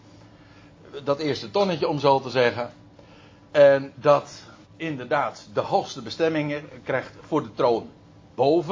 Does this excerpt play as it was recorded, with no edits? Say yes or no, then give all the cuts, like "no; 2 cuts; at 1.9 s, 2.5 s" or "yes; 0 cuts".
no; 1 cut; at 4.6 s